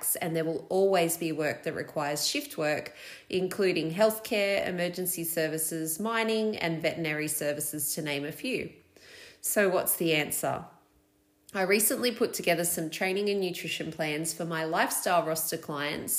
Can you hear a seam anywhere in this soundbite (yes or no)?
no